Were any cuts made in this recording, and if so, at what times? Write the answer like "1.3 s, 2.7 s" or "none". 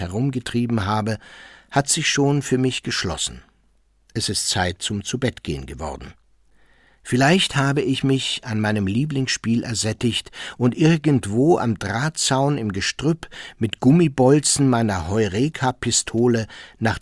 none